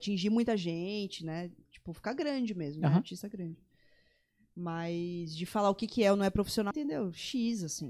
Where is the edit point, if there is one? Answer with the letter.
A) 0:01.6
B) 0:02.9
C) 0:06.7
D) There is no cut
C